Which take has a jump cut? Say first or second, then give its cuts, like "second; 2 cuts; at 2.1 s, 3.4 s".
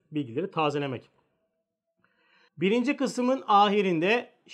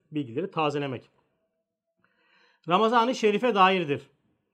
first; 1 cut; at 2.5 s